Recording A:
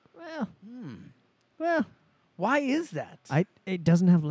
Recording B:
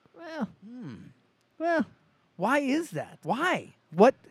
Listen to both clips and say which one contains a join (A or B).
B